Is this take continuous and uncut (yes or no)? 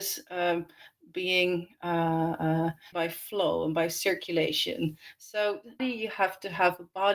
no